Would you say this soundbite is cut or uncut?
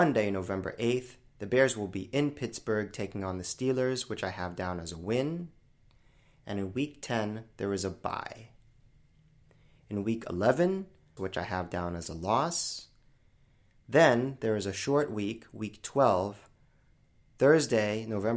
cut